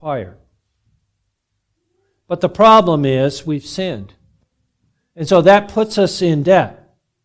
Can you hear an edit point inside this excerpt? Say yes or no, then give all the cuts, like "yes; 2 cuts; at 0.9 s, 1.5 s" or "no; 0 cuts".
no; 0 cuts